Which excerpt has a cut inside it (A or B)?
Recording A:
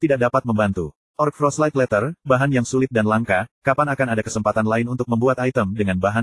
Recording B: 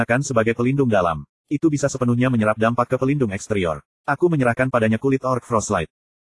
B